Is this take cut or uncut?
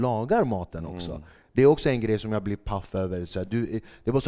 uncut